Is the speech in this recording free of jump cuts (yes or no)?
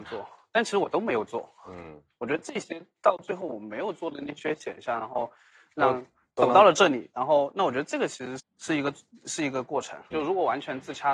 no